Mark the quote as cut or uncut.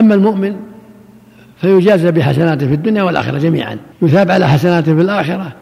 cut